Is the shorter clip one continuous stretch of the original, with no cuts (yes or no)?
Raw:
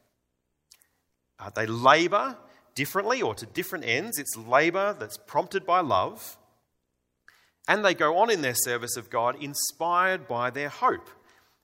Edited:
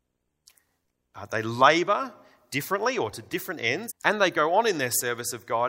no